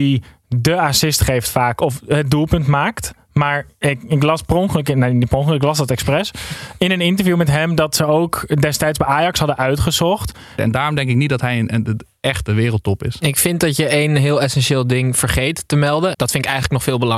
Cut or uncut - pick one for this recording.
cut